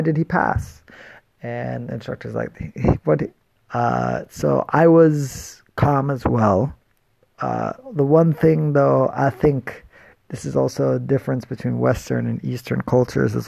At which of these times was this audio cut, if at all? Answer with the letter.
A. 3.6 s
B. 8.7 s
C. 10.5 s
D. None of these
A